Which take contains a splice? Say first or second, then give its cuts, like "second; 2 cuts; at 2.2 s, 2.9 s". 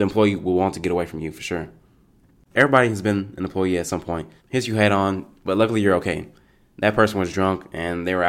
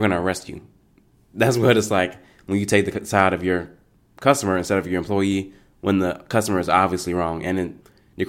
first; 2 cuts; at 2.5 s, 4.4 s